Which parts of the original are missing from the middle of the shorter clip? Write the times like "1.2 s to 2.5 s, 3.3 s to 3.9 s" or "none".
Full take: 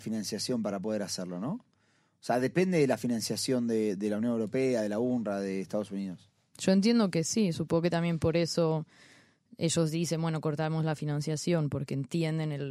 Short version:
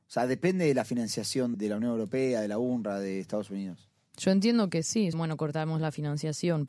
3.7 s to 3.9 s, 7.5 s to 10.2 s